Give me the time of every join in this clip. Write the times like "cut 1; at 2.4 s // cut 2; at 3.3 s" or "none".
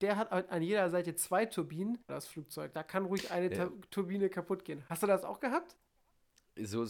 cut 1; at 2.1 s